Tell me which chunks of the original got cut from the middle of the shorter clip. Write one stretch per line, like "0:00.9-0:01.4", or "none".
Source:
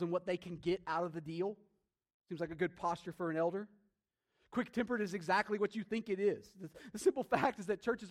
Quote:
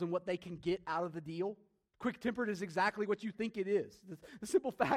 0:01.9-0:04.5